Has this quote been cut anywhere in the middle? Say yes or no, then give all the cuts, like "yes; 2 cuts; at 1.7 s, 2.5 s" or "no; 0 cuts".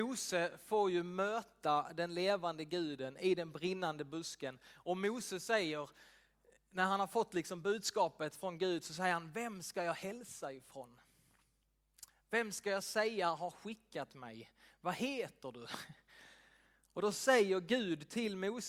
no; 0 cuts